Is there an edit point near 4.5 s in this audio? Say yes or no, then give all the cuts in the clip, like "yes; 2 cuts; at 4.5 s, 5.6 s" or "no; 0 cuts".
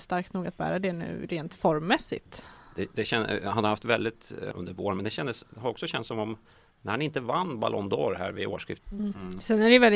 yes; 2 cuts; at 4.5 s, 8.8 s